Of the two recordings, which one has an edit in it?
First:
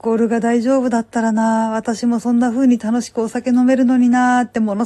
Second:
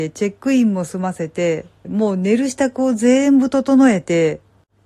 second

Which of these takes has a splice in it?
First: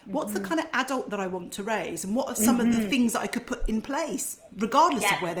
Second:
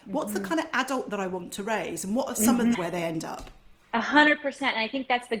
second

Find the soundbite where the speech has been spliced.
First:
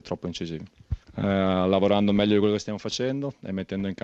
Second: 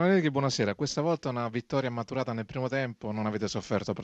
first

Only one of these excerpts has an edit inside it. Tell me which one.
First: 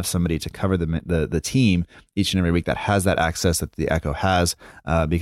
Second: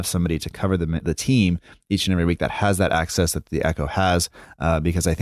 second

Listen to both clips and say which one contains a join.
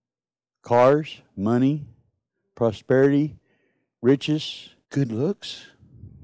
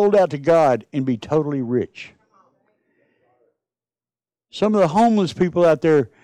first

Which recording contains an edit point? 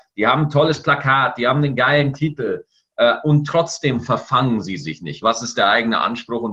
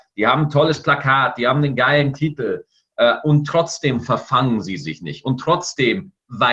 first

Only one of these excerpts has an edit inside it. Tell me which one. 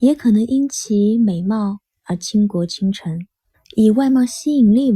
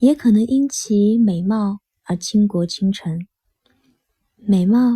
first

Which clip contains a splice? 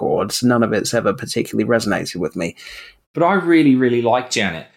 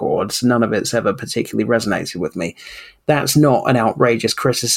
first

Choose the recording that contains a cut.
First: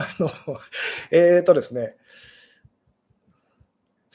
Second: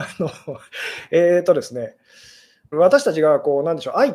second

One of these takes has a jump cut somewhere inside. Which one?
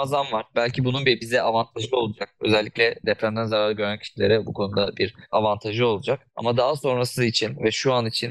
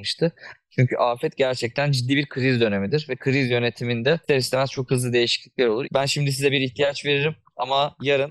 second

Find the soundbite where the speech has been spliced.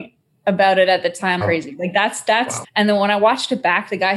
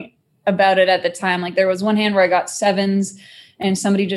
first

